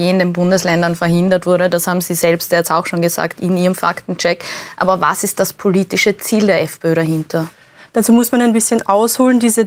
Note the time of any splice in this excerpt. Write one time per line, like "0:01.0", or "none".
none